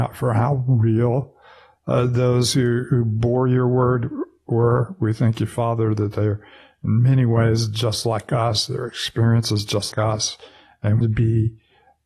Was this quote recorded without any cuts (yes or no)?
no